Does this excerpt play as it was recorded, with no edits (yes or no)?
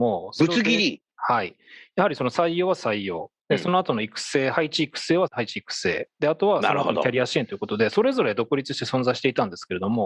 no